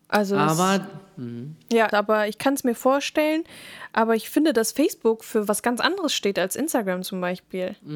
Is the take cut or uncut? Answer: cut